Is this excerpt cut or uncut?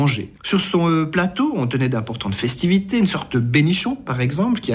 uncut